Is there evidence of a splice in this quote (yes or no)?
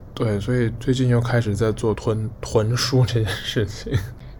yes